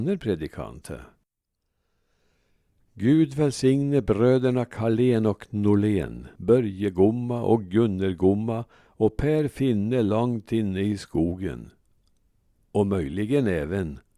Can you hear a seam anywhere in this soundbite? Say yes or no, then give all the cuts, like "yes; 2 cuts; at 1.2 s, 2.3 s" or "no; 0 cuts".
yes; 1 cut; at 6.4 s